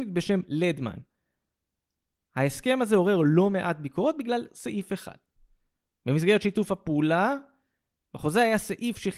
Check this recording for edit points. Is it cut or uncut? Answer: uncut